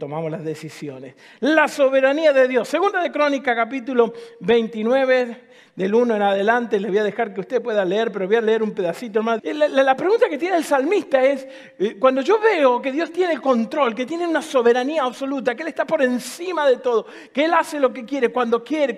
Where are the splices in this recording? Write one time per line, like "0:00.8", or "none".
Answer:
0:09.4